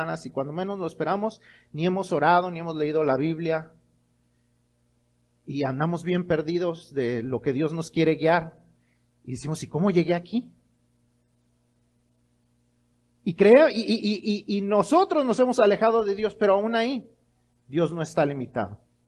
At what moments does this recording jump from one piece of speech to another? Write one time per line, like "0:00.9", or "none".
none